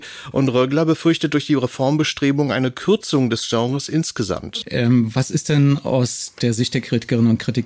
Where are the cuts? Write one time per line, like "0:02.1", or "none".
0:04.6